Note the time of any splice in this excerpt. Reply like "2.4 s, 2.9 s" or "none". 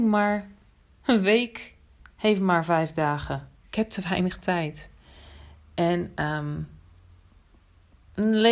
3.5 s